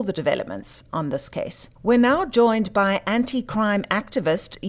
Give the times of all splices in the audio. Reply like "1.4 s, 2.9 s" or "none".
1.8 s